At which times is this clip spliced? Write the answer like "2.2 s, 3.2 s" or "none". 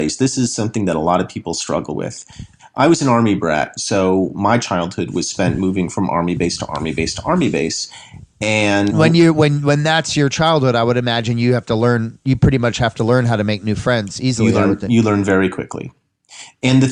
3.8 s, 8.9 s